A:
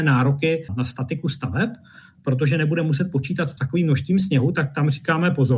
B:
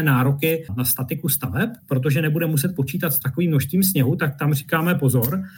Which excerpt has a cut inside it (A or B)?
B